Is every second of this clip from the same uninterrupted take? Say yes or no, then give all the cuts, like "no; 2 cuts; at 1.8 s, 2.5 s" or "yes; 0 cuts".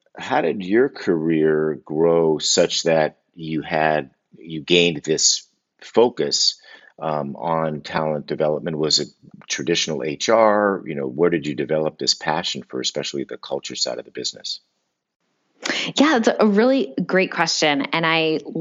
yes; 0 cuts